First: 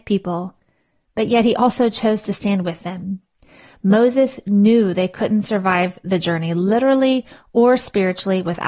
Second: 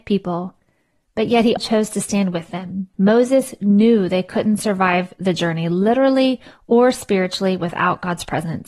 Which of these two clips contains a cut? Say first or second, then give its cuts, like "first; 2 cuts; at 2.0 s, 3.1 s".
second; 2 cuts; at 1.6 s, 2.9 s